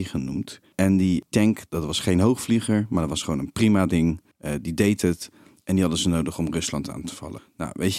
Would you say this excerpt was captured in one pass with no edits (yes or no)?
yes